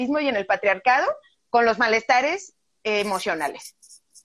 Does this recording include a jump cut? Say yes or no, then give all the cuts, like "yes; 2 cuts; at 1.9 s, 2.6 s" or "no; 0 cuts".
no; 0 cuts